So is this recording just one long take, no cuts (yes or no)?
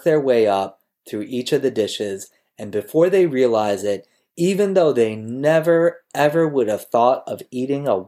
yes